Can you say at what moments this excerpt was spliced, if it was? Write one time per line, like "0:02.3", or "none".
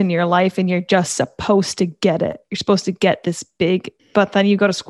0:04.0